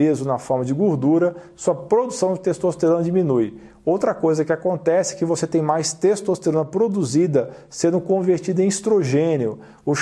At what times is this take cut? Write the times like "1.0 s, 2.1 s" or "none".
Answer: none